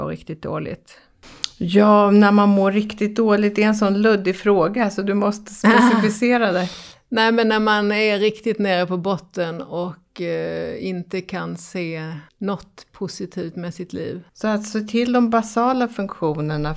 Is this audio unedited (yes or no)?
no